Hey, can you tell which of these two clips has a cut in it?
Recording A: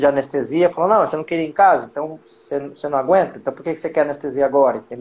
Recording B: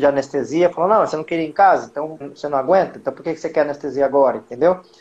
B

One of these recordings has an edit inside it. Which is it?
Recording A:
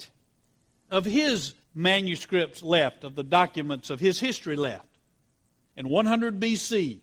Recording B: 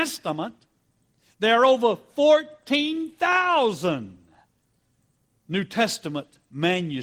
A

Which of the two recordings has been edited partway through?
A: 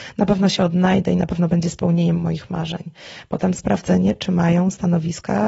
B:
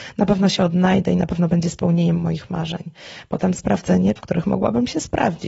B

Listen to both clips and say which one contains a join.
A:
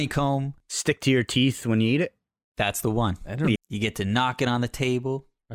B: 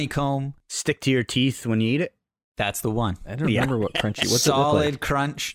A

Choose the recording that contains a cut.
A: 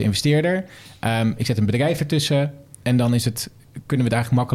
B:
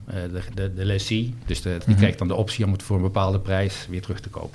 B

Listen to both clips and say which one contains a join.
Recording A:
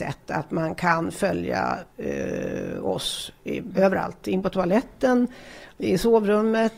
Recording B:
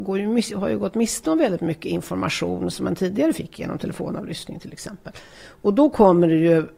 A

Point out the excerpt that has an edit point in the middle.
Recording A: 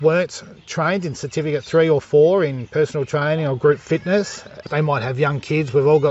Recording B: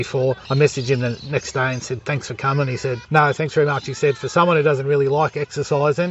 A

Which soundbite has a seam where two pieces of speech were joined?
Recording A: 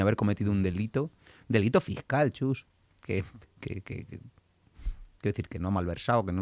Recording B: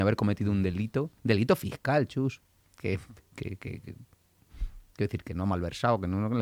B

